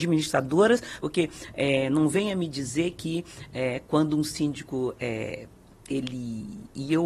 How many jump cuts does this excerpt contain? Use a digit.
1